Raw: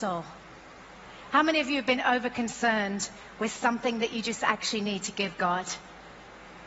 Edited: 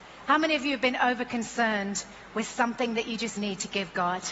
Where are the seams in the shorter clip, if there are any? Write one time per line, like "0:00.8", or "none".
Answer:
0:03.4